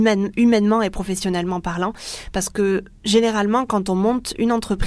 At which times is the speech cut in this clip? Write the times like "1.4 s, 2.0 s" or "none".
none